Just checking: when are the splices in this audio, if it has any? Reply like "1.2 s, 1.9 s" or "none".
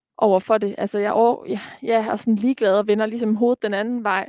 none